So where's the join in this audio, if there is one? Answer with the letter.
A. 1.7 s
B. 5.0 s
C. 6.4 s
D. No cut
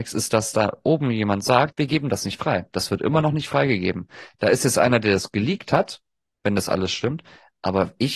A